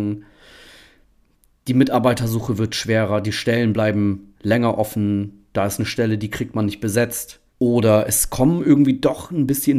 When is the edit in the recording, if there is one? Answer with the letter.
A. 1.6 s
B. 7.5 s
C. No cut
B